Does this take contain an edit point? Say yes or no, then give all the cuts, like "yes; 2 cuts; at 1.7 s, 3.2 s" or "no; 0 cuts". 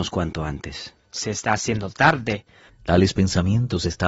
yes; 1 cut; at 2.7 s